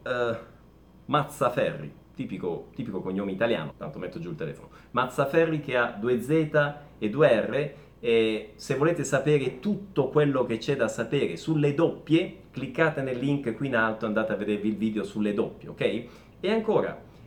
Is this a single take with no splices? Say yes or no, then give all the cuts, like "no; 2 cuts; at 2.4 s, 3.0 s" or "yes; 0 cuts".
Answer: no; 2 cuts; at 3.7 s, 16.3 s